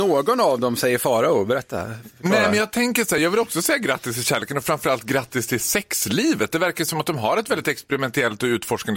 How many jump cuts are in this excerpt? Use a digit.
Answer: 0